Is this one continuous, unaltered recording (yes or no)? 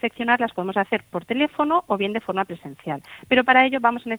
yes